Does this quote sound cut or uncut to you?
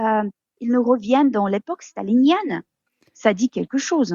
uncut